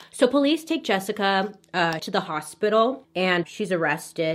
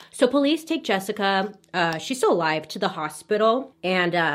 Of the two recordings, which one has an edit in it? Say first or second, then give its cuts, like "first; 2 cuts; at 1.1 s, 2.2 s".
first; 2 cuts; at 2.0 s, 3.4 s